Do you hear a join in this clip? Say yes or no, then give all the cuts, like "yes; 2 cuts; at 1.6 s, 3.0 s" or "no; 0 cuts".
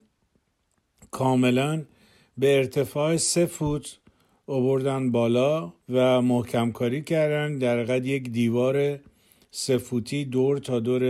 yes; 1 cut; at 5.8 s